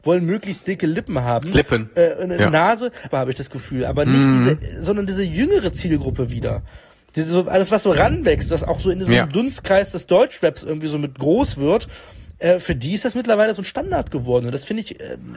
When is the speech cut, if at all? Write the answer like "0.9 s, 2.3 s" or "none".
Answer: 3.1 s